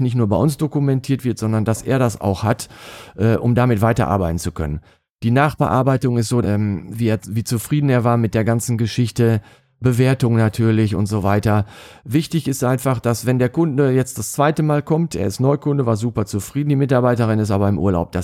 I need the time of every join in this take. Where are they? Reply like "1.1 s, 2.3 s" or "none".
6.4 s